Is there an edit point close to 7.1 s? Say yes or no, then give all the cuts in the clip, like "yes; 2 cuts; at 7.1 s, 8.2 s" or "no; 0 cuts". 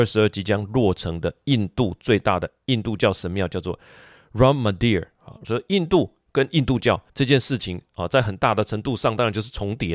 yes; 2 cuts; at 5.4 s, 7.1 s